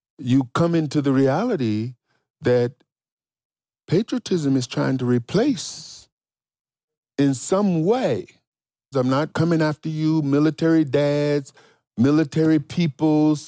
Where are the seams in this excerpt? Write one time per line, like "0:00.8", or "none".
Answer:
0:08.9